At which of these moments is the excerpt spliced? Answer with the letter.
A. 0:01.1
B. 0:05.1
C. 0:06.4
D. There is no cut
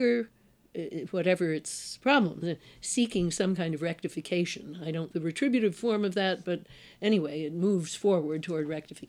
B